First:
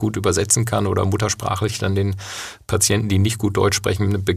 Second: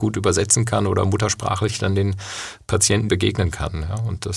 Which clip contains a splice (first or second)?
second